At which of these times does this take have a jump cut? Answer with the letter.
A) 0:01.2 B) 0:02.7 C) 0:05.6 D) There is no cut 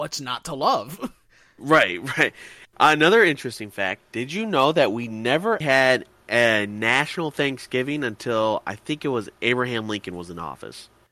C